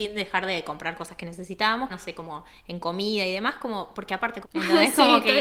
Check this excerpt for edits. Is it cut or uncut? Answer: cut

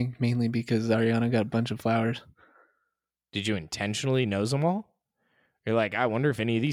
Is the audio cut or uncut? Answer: uncut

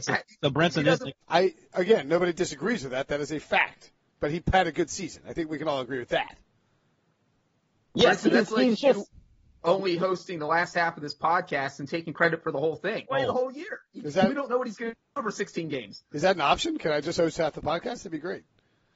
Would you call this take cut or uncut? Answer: cut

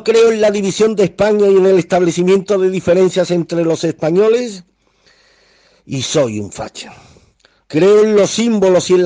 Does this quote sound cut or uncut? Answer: cut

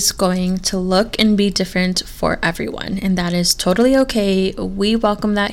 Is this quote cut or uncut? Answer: uncut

